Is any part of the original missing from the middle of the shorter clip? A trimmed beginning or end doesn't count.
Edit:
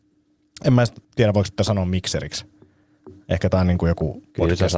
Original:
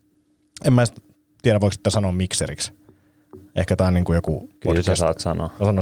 yes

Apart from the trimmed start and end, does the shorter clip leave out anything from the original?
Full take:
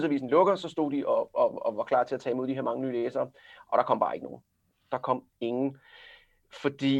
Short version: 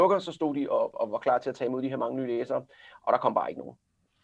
yes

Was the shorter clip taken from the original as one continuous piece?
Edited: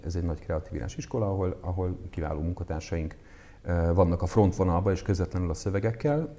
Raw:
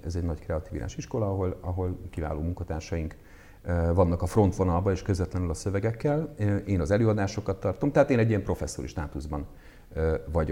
yes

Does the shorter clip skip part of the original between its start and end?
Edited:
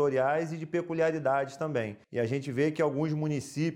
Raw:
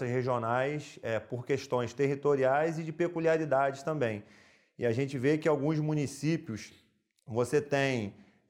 yes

